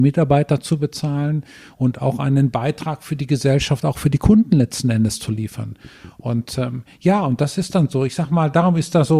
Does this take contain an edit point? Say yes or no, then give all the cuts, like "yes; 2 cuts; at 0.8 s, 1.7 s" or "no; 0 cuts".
no; 0 cuts